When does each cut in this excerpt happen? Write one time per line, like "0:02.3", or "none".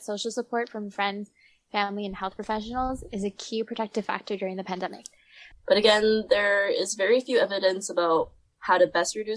0:05.5